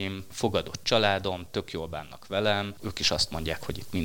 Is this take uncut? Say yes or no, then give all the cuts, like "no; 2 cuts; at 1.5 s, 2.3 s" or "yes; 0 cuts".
no; 1 cut; at 2.8 s